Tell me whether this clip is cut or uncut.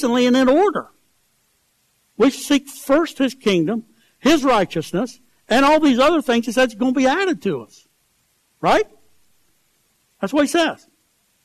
uncut